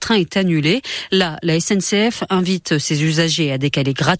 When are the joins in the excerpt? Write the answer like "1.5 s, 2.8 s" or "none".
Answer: none

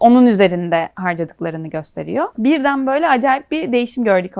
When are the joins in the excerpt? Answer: 2.3 s

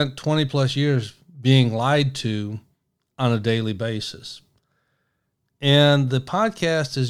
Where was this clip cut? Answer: 5.4 s

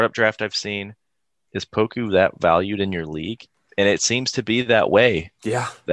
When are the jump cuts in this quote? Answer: 1.5 s

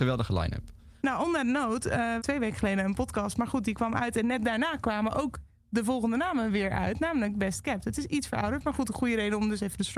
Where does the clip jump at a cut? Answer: 1.0 s, 2.2 s

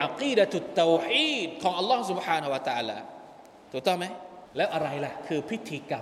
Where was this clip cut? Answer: 4.5 s

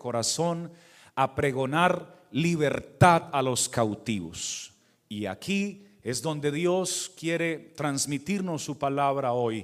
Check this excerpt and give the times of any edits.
none

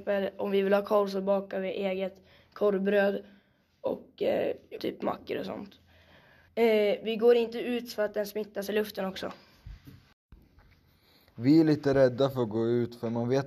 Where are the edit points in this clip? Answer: 4.8 s, 6.5 s

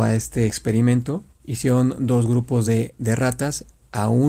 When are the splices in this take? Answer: none

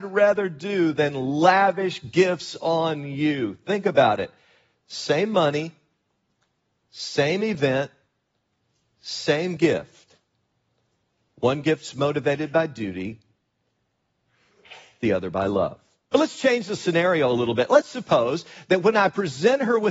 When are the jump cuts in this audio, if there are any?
16.1 s

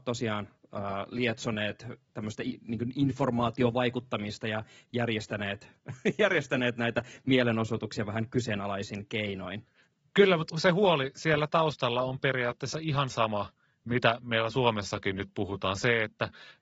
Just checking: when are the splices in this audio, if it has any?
10.5 s

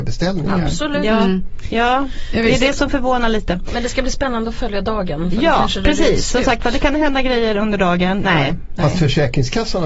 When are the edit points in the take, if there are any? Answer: 8.2 s

